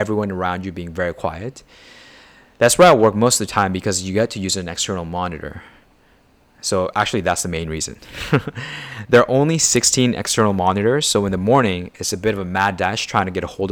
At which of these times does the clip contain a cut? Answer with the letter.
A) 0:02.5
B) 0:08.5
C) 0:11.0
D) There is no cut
D